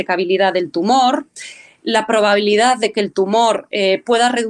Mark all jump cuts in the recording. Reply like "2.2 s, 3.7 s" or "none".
none